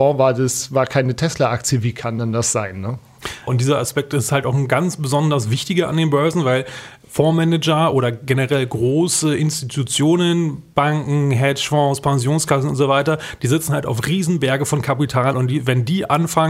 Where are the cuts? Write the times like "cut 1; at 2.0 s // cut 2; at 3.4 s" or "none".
cut 1; at 3.5 s